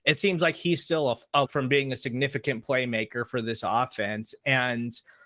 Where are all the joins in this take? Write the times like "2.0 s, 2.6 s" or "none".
1.4 s